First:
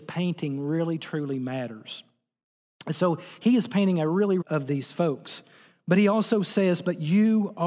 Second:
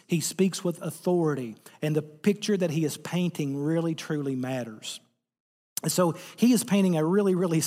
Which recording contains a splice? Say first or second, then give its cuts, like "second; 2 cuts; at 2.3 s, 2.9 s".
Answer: first; 1 cut; at 4.4 s